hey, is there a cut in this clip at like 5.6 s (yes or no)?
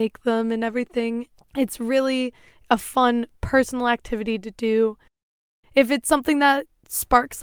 yes